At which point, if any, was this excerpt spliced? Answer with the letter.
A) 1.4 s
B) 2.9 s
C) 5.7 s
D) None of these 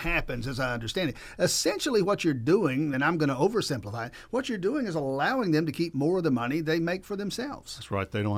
D